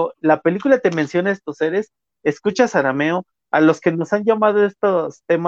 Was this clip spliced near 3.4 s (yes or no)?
no